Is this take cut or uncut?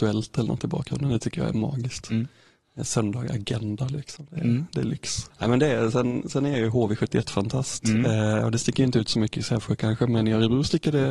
uncut